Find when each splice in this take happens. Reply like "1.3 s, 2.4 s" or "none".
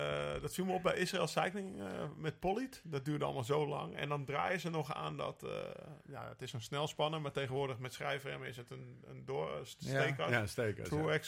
none